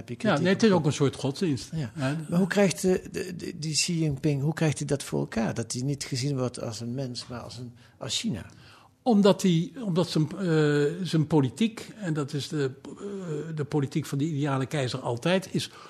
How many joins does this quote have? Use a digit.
0